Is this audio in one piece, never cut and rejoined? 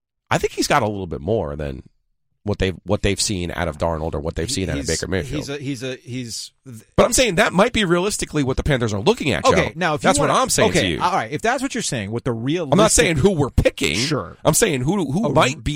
yes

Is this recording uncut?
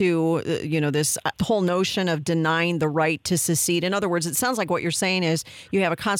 no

